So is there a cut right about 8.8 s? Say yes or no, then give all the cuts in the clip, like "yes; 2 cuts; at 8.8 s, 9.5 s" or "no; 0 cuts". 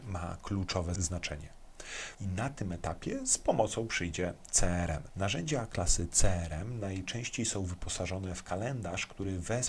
no; 2 cuts; at 2.1 s, 5.1 s